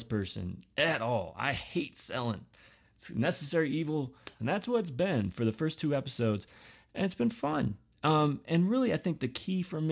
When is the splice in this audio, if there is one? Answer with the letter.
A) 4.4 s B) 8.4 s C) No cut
A